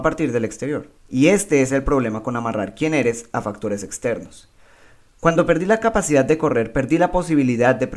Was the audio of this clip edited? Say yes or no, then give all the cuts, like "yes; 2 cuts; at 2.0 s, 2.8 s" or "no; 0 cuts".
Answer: yes; 1 cut; at 0.9 s